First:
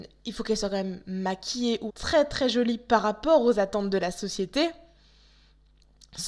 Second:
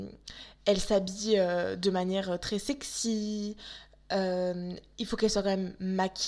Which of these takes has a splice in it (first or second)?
first